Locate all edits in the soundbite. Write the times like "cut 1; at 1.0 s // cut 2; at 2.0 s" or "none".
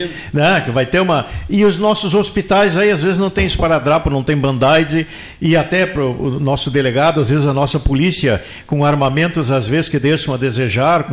none